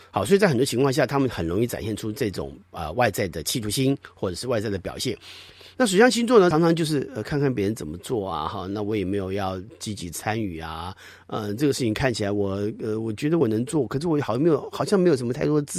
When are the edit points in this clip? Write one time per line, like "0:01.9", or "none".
0:06.5

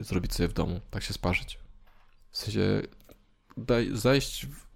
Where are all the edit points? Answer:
none

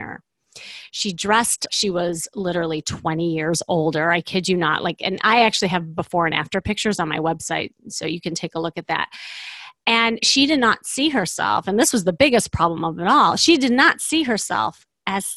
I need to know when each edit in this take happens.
0:01.7

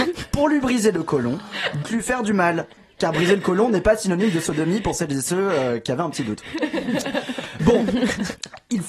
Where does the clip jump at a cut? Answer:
0:01.8
0:07.6

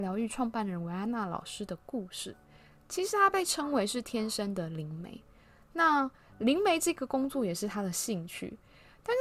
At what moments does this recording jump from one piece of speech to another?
none

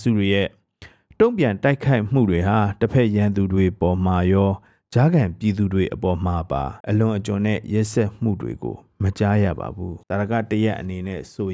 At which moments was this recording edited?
0:06.8
0:10.0

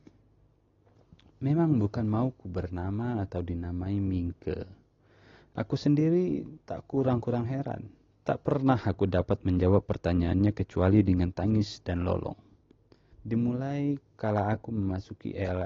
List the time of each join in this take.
0:08.1
0:13.1

